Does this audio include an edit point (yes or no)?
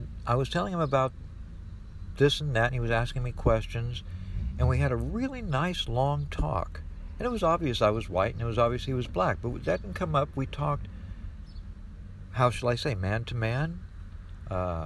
no